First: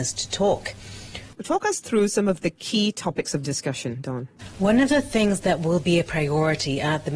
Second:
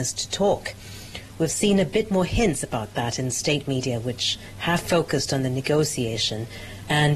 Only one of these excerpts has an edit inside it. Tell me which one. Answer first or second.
first